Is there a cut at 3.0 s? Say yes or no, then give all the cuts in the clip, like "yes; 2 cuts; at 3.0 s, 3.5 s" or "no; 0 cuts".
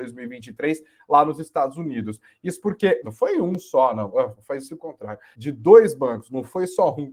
yes; 2 cuts; at 3.0 s, 5.3 s